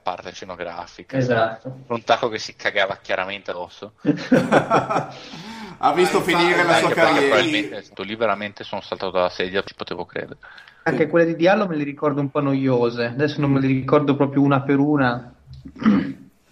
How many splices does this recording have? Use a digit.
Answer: 2